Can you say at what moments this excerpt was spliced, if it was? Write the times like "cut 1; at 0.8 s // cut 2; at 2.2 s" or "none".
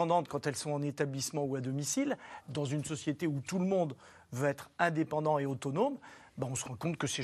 cut 1; at 2.4 s